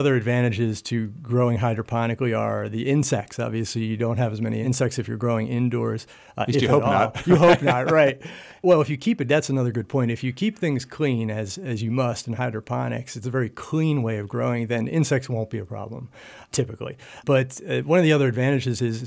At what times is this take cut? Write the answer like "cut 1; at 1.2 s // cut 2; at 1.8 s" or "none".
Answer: none